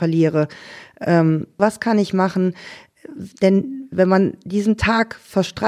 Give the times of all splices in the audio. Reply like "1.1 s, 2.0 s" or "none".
1.6 s